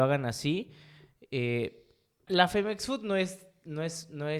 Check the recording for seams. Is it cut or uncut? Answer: cut